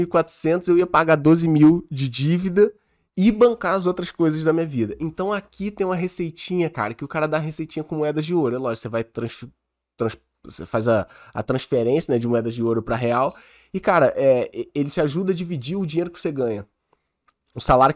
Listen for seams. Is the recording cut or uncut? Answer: uncut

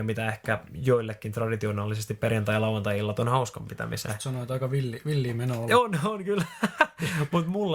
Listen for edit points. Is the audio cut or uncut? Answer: cut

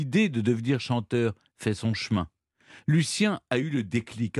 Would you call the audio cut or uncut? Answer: uncut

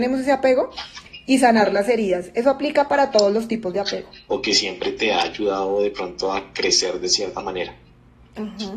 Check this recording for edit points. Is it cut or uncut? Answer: cut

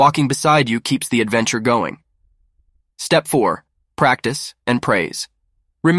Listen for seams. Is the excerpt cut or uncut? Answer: cut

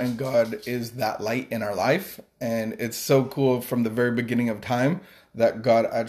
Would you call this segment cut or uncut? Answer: uncut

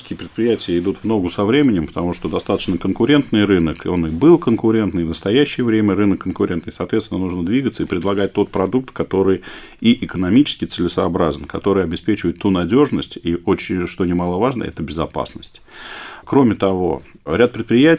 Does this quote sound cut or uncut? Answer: uncut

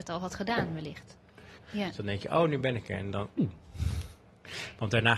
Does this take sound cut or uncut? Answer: cut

